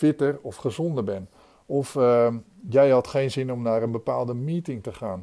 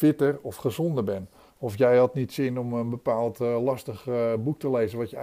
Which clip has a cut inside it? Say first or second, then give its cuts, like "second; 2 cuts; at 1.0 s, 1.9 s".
second; 1 cut; at 1.5 s